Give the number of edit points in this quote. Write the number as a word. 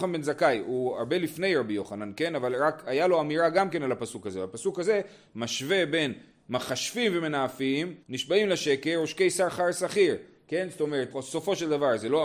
two